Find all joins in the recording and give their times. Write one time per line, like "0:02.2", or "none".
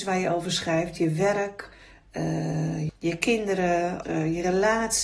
0:02.9
0:04.0